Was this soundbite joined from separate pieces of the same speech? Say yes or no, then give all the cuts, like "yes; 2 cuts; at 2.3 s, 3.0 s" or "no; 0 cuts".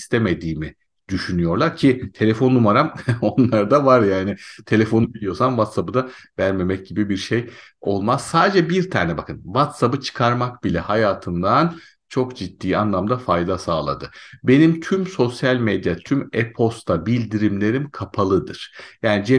no; 0 cuts